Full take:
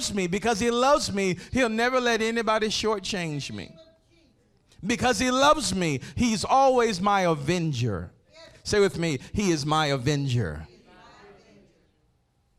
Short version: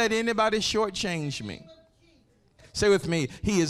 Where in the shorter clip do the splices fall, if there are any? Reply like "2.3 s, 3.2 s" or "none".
2.6 s

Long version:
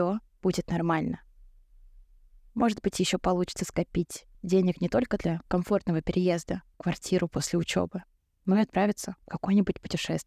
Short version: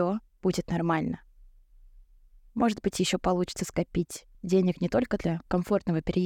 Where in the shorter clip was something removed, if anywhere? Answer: none

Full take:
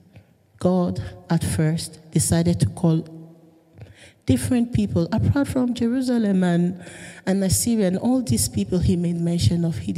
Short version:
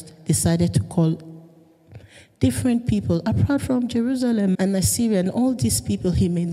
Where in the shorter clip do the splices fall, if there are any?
4.5 s

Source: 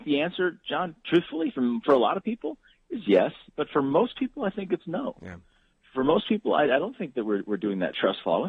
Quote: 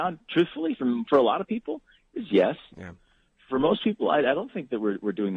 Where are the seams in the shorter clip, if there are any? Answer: 2.7 s

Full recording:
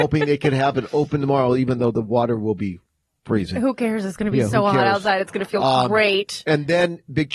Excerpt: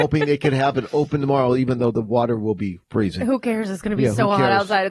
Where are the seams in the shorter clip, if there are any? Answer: 2.8 s

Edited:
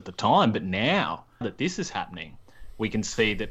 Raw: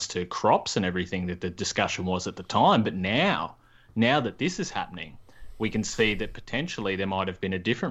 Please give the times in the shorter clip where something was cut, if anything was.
1.4 s

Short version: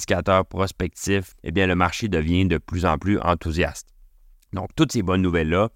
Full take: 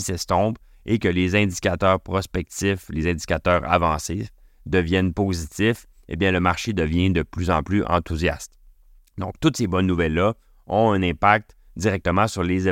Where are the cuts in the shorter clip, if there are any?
1.3 s

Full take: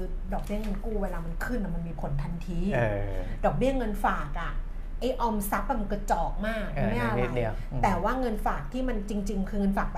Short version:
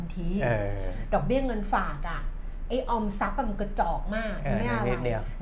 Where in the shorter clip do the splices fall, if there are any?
none

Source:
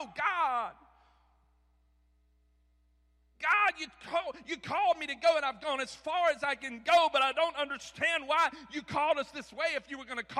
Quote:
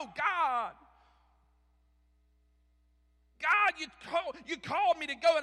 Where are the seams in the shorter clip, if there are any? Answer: none

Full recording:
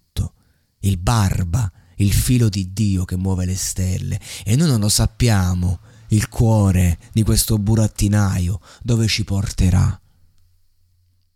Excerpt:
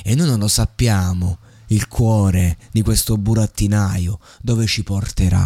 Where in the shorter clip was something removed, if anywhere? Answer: none

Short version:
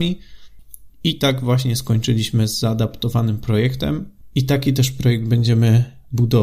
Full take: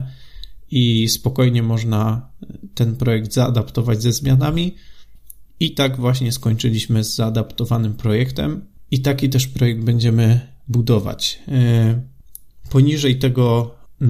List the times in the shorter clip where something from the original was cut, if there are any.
none

